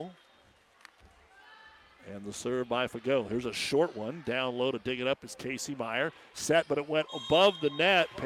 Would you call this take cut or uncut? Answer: uncut